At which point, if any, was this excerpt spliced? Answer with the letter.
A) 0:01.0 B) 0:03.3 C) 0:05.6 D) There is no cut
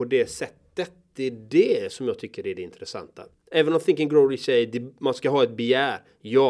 D